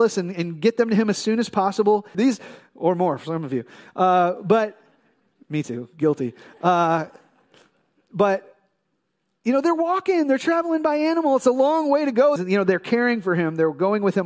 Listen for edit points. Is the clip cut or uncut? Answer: cut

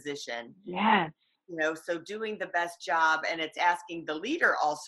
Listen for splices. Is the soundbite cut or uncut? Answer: uncut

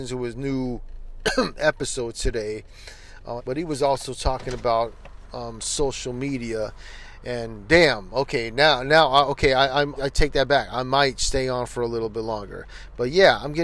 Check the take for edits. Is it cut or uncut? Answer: cut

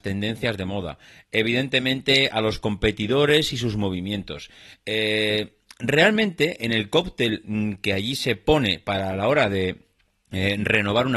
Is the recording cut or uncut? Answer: uncut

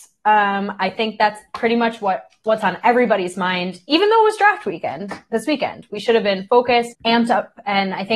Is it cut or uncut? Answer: cut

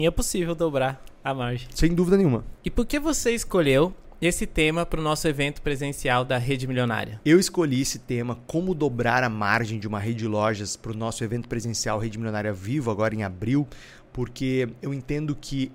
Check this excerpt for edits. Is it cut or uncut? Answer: uncut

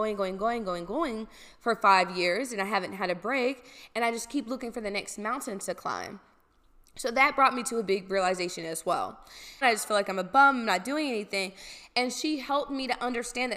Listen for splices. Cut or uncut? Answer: cut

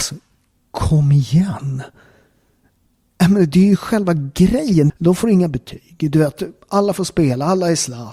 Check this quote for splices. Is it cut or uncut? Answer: cut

